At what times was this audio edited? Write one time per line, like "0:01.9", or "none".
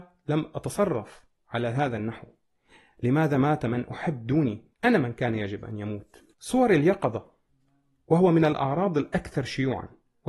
0:04.7
0:06.3